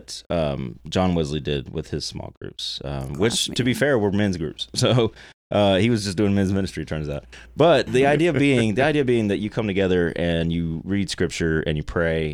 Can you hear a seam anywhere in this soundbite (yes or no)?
yes